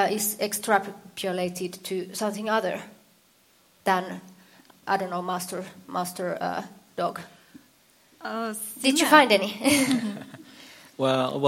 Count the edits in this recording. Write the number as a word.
zero